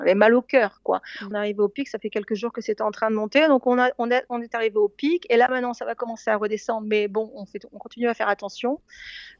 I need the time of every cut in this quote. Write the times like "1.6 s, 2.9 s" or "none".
1.3 s